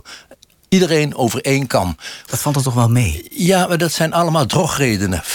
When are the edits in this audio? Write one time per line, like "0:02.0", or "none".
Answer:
0:02.3

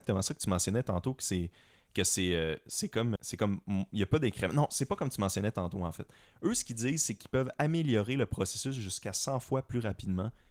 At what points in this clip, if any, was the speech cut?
0:03.2

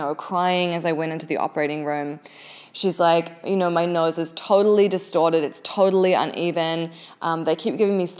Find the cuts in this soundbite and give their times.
none

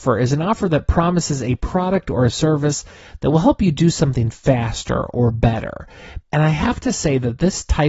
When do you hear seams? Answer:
0:06.2

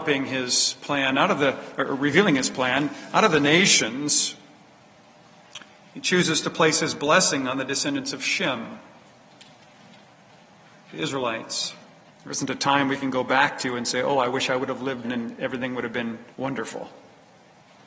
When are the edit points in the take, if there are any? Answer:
0:12.1
0:15.0
0:16.3

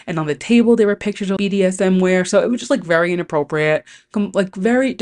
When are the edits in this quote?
0:01.4

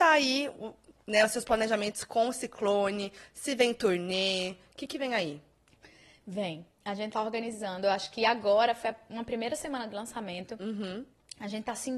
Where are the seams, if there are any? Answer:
none

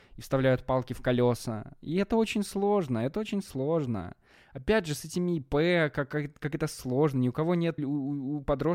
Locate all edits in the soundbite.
0:07.8

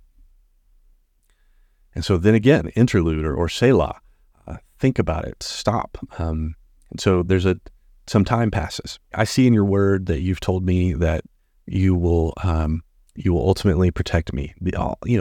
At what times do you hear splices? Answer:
0:09.1

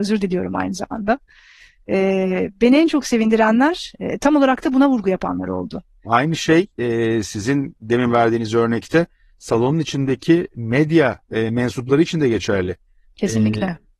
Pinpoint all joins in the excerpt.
0:06.0

